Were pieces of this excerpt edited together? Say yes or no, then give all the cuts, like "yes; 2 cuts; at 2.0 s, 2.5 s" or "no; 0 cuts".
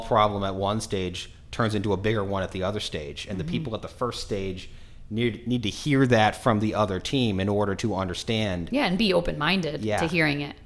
no; 0 cuts